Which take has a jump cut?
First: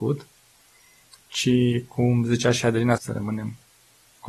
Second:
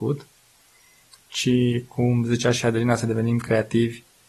first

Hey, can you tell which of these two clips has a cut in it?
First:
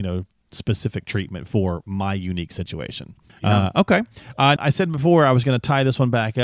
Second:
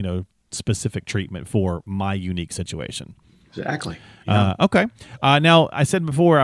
first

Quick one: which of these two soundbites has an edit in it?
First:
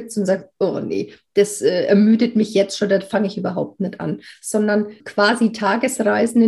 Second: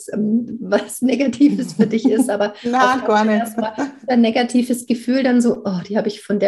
first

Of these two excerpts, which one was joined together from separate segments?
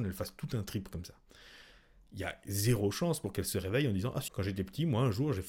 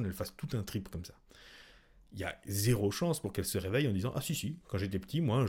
first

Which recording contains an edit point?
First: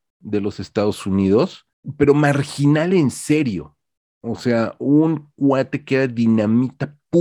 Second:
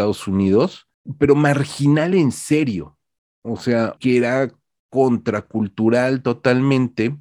second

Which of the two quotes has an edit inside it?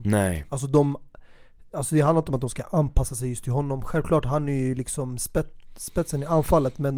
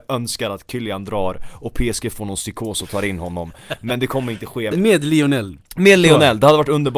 second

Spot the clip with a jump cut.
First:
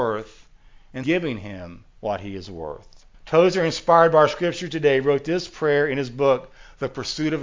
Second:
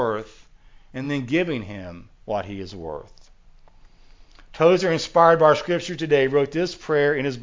first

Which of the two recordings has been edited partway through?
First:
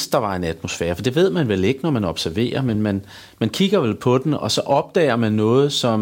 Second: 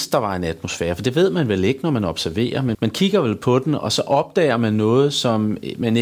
second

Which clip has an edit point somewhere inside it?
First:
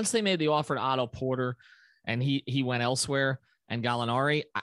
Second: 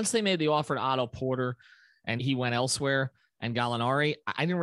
second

